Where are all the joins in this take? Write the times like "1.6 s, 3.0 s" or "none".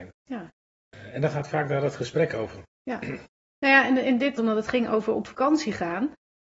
4.4 s